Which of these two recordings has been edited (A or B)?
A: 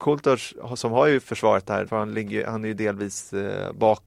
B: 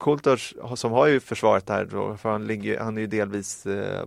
A